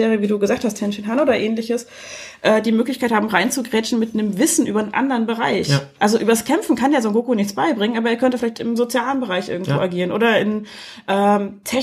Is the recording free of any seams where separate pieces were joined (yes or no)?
yes